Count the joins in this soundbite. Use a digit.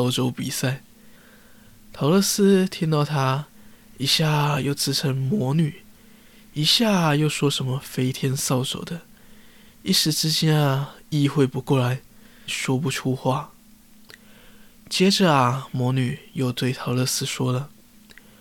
2